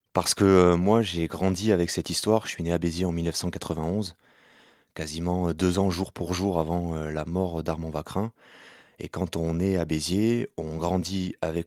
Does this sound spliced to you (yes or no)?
no